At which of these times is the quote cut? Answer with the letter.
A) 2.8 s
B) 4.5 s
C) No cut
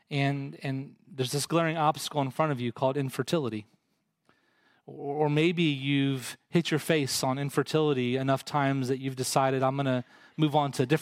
C